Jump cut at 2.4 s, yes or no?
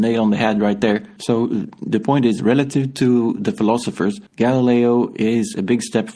no